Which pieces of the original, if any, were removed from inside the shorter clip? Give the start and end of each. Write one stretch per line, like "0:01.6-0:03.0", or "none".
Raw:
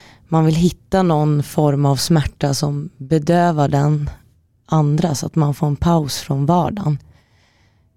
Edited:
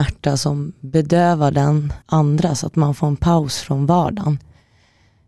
0:04.2-0:04.6